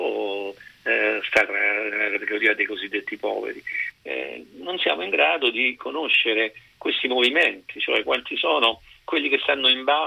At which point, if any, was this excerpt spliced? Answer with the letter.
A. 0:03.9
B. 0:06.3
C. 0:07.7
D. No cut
A